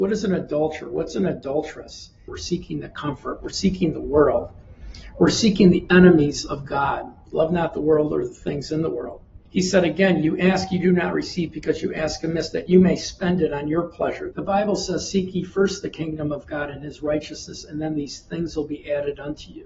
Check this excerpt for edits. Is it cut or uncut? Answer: cut